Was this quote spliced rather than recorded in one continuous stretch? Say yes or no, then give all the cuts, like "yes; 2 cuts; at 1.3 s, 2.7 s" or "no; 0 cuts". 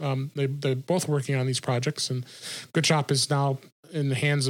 no; 0 cuts